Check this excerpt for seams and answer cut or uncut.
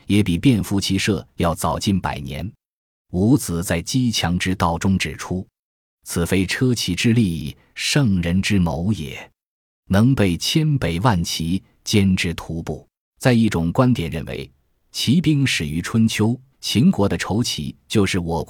cut